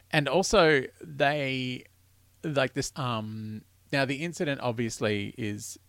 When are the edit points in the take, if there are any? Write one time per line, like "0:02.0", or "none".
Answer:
0:02.9